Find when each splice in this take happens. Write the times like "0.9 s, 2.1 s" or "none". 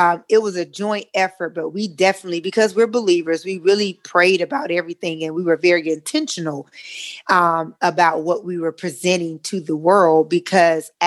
none